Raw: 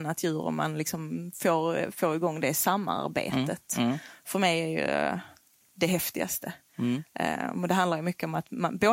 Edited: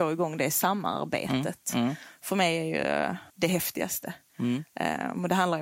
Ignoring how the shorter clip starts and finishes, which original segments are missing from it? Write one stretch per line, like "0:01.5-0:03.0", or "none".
0:05.3-0:05.7